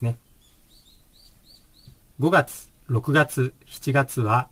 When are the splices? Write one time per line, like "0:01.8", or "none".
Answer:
0:02.0